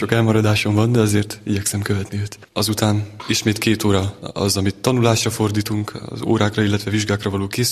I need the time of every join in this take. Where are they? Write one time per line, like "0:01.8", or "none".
0:02.5